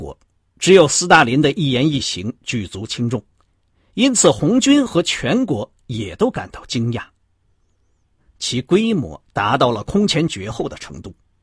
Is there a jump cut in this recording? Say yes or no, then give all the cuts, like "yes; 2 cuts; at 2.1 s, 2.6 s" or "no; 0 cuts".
yes; 1 cut; at 8.2 s